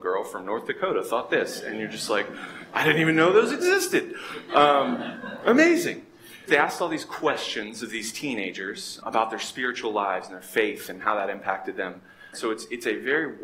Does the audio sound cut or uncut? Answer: cut